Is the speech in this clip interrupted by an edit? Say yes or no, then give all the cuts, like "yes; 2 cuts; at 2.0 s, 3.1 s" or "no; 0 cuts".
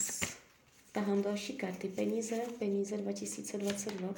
no; 0 cuts